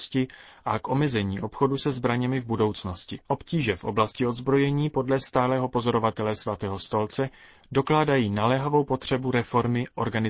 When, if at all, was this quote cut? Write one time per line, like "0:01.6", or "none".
0:03.2